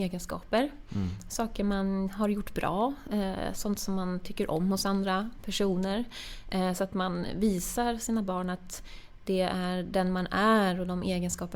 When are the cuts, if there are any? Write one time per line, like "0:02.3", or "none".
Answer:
none